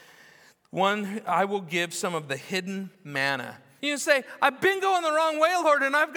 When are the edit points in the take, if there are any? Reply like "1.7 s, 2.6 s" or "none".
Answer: 3.8 s